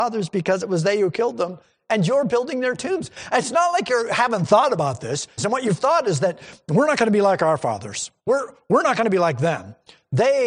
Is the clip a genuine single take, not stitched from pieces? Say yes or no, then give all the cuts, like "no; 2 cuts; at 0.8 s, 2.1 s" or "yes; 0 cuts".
no; 2 cuts; at 5.4 s, 8.2 s